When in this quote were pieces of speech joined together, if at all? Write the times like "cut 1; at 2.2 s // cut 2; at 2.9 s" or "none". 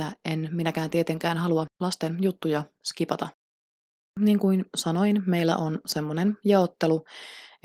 none